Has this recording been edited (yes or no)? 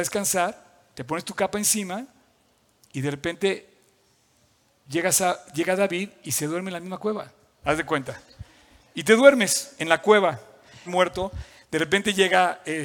yes